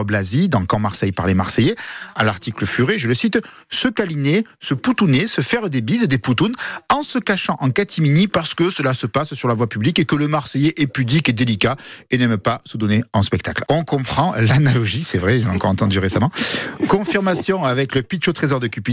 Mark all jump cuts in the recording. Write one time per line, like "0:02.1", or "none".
0:13.6